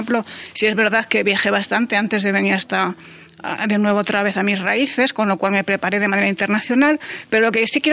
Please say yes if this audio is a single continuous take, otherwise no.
yes